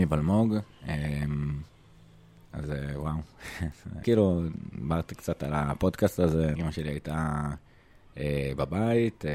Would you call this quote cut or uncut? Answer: cut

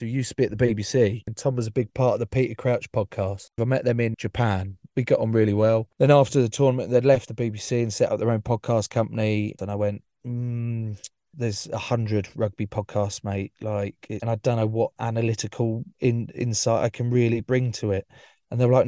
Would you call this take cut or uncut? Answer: cut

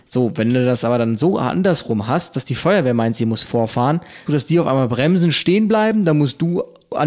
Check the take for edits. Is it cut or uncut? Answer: cut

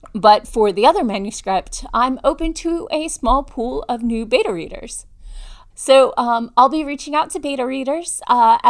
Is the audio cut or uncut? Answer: cut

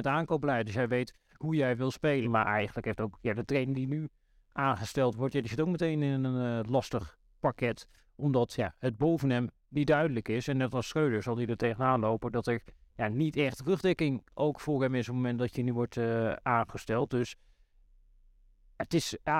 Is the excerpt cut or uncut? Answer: cut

